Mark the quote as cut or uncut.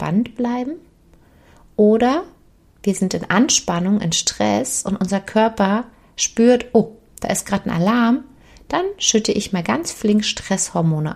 uncut